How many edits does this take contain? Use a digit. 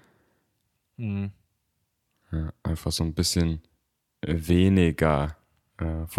0